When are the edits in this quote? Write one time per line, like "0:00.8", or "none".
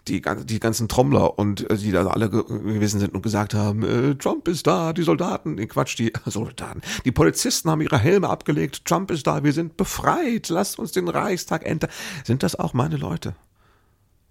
none